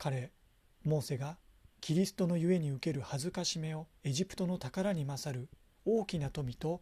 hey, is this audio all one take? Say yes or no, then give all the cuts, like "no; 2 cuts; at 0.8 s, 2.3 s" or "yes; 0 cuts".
no; 2 cuts; at 1.8 s, 4.0 s